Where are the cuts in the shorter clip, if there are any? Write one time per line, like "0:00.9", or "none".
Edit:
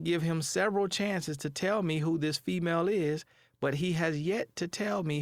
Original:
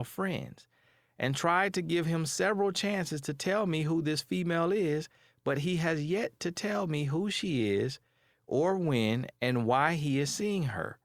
none